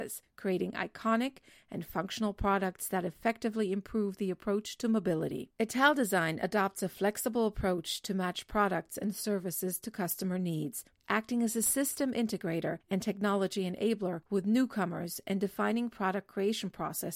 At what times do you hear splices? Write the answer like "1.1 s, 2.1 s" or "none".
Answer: 5.6 s, 10.9 s